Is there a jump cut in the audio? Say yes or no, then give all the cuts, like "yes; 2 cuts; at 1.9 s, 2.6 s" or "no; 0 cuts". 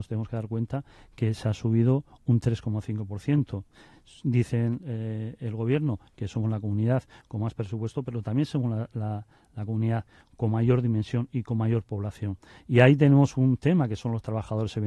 no; 0 cuts